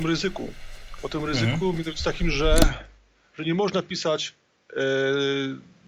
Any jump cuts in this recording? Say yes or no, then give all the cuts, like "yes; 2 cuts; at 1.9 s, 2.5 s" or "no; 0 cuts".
no; 0 cuts